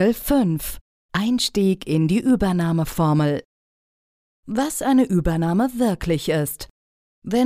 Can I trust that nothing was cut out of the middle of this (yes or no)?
yes